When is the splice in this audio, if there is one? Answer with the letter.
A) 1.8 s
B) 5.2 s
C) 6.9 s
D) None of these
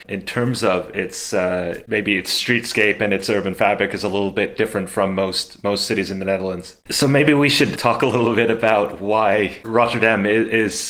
C